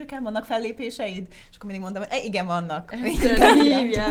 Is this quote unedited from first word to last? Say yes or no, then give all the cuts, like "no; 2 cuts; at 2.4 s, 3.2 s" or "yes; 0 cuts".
yes; 0 cuts